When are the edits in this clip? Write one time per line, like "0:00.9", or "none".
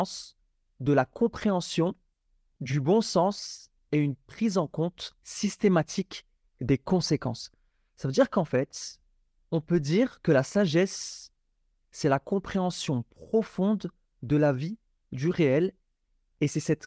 none